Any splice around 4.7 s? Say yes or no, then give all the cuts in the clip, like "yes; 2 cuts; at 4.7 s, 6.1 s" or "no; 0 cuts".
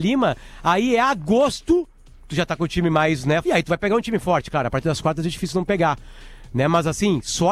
no; 1 cut; at 3.4 s